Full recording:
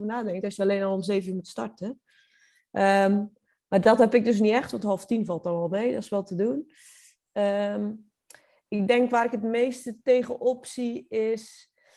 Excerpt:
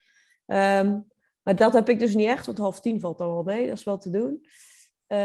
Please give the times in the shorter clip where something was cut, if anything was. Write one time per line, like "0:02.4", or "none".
none